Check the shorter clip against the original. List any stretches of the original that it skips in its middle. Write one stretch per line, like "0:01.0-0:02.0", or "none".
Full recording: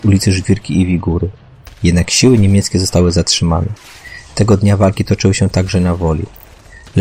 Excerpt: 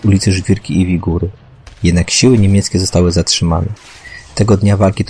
none